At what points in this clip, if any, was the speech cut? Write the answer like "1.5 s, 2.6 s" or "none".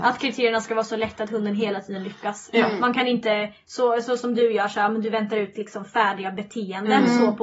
none